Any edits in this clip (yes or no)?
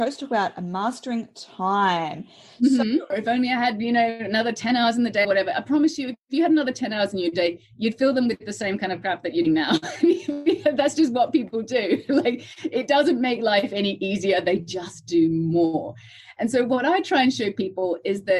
yes